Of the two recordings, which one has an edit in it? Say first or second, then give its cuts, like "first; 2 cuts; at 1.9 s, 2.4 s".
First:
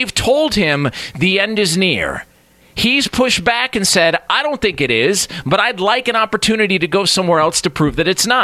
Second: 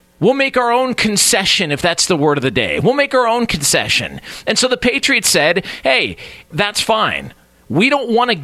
second; 1 cut; at 6.5 s